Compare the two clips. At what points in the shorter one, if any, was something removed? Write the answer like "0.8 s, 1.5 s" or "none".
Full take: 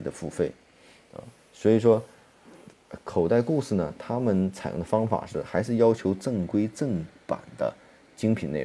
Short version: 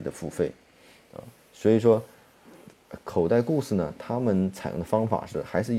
none